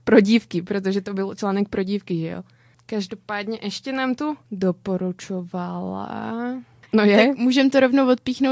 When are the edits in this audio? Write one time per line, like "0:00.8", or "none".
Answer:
0:06.8

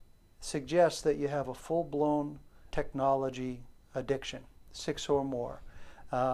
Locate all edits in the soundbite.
0:02.7

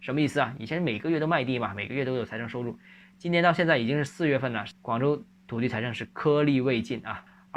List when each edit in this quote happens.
none

